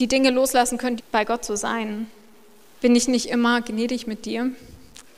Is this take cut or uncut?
cut